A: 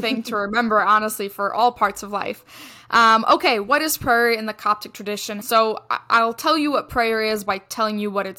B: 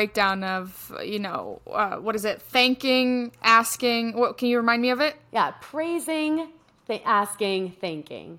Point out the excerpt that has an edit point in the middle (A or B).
A